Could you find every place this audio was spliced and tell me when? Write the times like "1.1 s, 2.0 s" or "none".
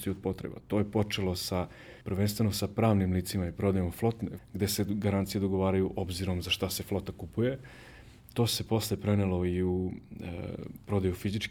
2.0 s, 4.4 s